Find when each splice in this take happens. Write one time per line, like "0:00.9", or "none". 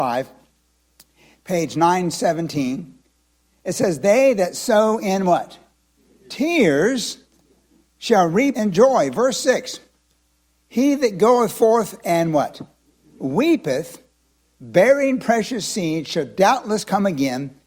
0:08.5